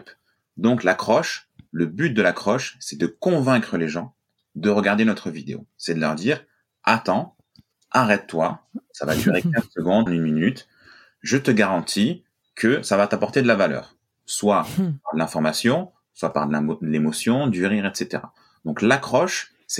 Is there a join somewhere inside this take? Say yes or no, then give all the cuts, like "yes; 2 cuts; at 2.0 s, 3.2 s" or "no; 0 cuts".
yes; 1 cut; at 10.1 s